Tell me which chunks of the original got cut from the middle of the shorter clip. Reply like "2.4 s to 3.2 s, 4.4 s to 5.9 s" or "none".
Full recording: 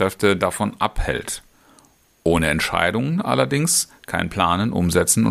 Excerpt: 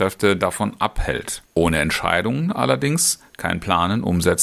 1.5 s to 2.1 s